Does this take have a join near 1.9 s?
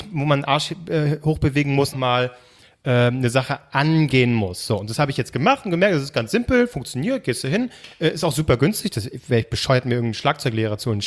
yes; 1 cut; at 1.9 s

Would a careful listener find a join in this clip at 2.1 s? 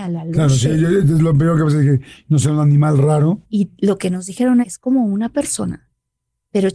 no; 2 cuts; at 3.4 s, 4.6 s

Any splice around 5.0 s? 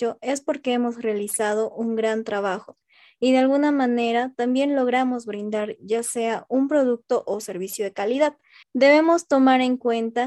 no; 1 cut; at 8.6 s

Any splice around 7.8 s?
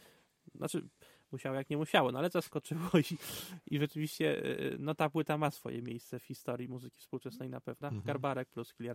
yes; 1 cut; at 7.8 s

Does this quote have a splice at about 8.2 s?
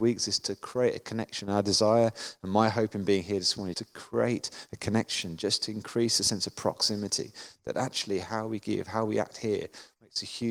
yes; 2 cuts; at 3.7 s, 8.2 s

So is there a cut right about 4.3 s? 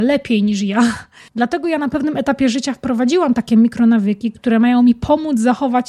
no; 1 cut; at 1.3 s

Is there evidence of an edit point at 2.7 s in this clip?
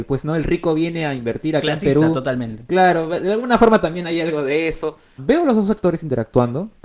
no; 1 cut; at 5.2 s

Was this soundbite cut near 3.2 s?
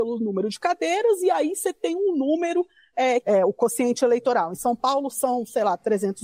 yes; 1 cut; at 3.2 s

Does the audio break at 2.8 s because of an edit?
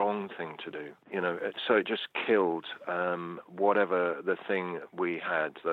no; 1 cut; at 1.0 s

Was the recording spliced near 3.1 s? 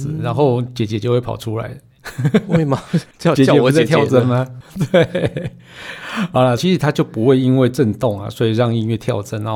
no; 1 cut; at 6.6 s

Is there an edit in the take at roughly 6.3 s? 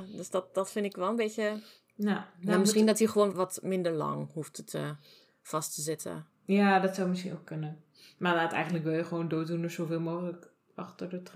no; 1 cut; at 3.3 s

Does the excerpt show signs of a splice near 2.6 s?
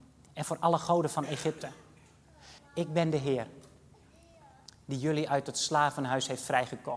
yes; 1 cut; at 2.6 s

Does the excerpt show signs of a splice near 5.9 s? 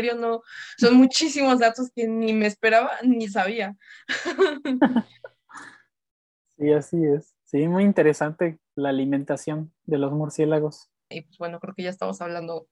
no; 2 cuts; at 7.4 s, 11.1 s

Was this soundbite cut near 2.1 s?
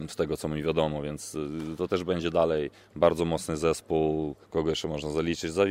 no; 1 cut; at 4.4 s

